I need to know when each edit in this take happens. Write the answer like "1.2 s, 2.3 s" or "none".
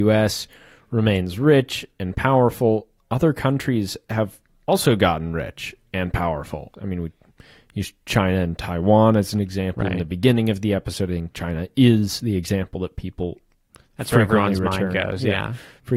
6.7 s